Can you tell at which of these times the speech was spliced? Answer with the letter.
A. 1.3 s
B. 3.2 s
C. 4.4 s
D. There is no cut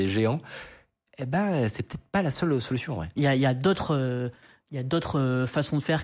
B